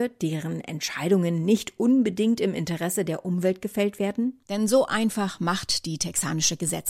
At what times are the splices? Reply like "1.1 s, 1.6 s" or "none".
4.4 s